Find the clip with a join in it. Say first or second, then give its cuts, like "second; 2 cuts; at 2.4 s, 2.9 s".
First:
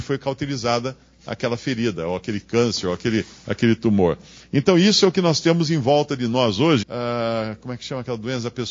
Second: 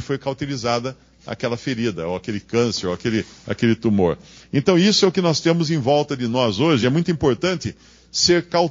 first; 1 cut; at 6.8 s